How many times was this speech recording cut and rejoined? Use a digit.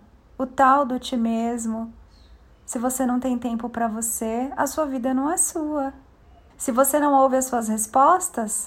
1